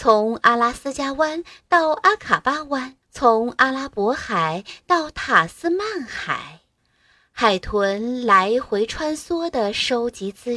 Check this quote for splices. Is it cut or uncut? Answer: cut